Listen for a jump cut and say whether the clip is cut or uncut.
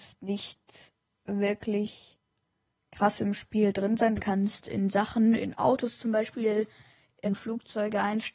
cut